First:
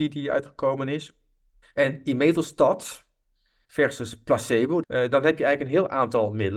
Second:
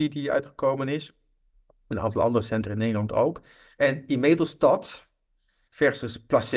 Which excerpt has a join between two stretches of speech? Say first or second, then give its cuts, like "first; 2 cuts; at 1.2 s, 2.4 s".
first; 2 cuts; at 1.6 s, 4.8 s